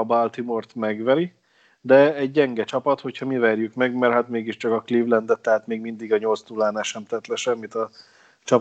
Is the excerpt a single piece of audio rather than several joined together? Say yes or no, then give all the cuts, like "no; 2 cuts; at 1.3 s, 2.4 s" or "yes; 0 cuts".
yes; 0 cuts